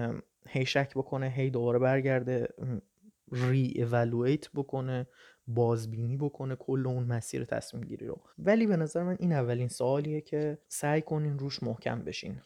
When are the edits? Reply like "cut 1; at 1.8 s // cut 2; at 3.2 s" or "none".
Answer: cut 1; at 8.3 s // cut 2; at 10.6 s